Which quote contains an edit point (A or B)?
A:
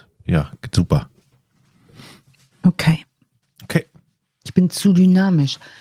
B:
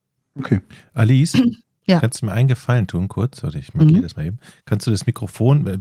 A